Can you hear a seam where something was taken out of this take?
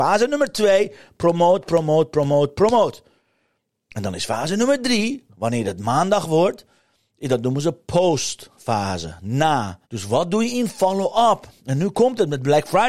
yes; 1 cut; at 9.8 s

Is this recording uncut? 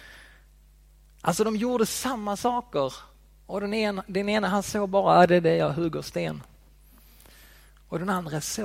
yes; 0 cuts

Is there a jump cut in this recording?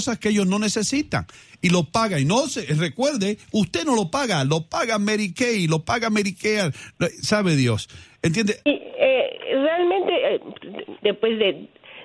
yes; 2 cuts; at 8.6 s, 11.0 s

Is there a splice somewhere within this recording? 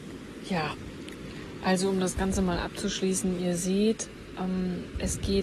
no; 0 cuts

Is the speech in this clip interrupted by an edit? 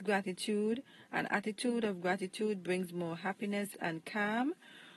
yes; 1 cut; at 3.7 s

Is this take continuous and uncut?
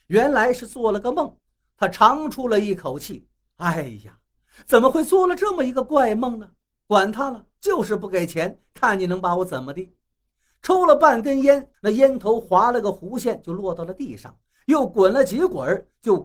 no; 1 cut; at 11.7 s

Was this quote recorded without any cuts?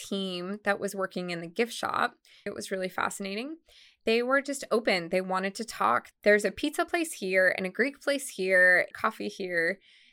no; 3 cuts; at 2.5 s, 6.1 s, 8.9 s

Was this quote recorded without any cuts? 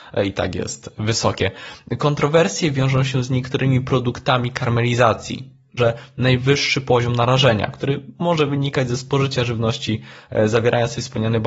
no; 1 cut; at 5.8 s

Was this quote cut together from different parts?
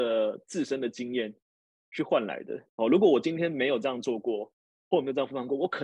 no; 0 cuts

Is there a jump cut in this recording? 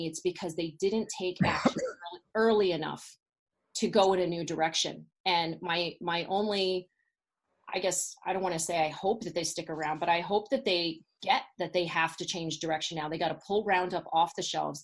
no; 0 cuts

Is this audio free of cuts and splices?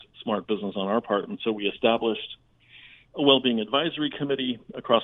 yes; 0 cuts

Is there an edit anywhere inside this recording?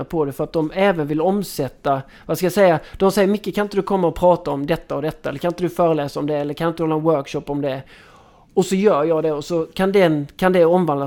no; 0 cuts

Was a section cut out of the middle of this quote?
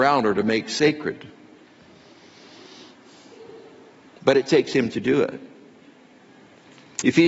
no; 0 cuts

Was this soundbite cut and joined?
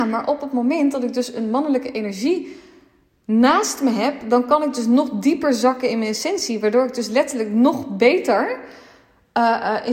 no; 0 cuts

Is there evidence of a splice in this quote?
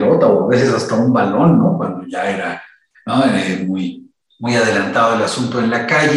no; 0 cuts

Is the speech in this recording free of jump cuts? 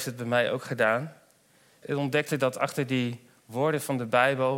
no; 1 cut; at 1.8 s

